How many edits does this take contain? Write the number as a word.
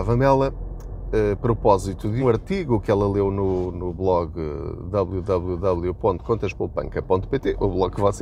one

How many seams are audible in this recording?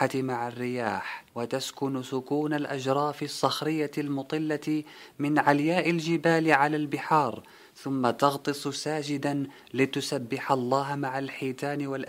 one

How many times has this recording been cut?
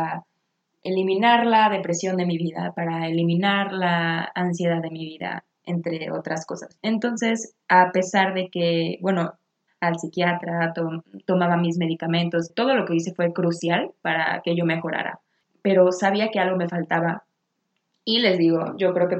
three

